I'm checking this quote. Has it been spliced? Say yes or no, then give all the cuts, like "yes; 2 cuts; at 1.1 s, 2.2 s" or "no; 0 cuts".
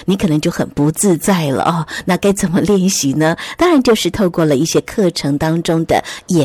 no; 0 cuts